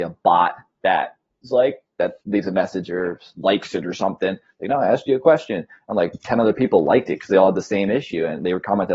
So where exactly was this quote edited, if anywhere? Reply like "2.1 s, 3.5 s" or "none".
none